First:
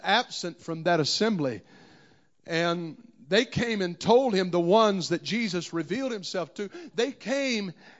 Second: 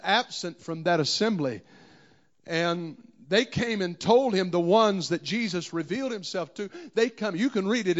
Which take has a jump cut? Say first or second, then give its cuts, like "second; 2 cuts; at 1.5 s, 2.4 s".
first; 1 cut; at 6.9 s